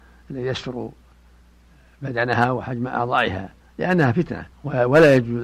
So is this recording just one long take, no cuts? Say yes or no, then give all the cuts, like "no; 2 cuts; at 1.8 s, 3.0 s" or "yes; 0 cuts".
no; 1 cut; at 4.5 s